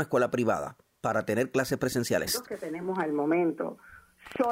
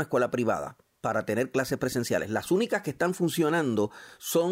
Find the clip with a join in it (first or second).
first